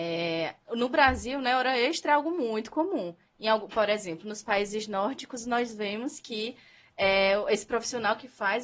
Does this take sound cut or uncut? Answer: uncut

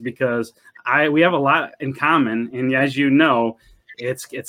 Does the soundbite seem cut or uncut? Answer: uncut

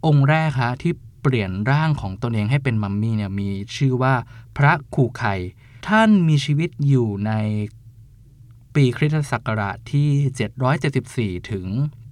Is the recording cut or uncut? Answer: cut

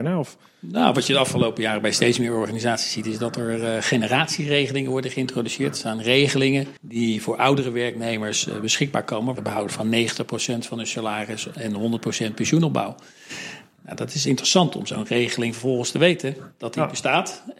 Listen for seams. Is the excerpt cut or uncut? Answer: cut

